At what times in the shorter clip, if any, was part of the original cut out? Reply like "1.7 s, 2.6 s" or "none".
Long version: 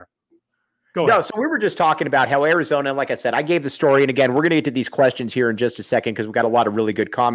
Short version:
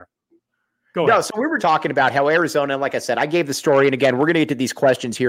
1.6 s